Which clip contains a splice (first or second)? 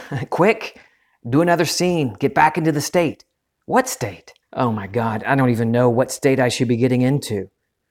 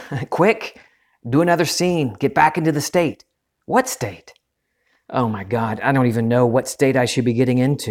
first